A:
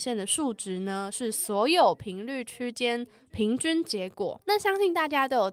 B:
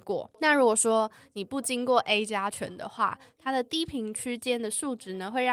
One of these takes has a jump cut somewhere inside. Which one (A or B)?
A